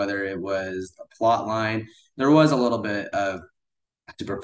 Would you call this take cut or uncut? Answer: uncut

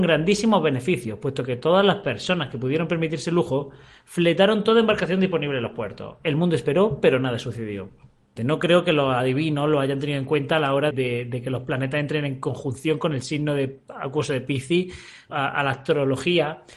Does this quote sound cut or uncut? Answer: cut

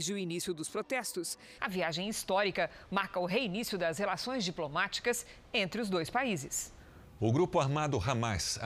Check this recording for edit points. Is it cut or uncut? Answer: cut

